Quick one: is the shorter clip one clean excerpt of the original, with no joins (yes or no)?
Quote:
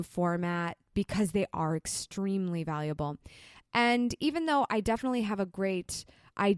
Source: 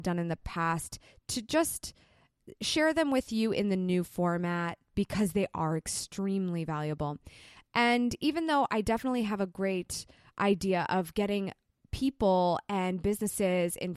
yes